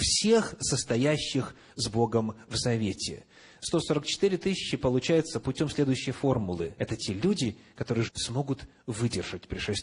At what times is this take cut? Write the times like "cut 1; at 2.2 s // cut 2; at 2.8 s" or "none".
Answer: cut 1; at 6.7 s // cut 2; at 8.1 s